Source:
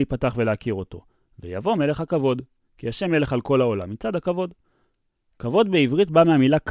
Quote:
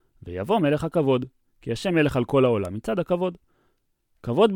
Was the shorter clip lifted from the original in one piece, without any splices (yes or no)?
yes